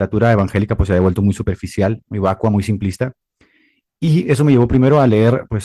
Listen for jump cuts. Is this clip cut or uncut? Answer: uncut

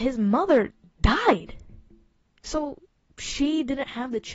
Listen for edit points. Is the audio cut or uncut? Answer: uncut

